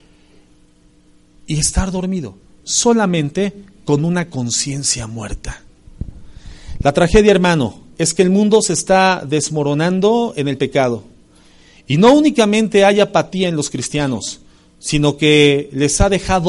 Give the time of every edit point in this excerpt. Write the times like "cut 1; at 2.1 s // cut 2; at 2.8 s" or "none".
none